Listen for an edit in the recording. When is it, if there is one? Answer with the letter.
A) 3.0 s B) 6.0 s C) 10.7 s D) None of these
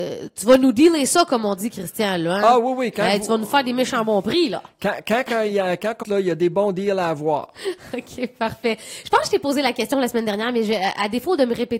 B